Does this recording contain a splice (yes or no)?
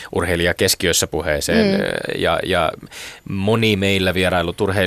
no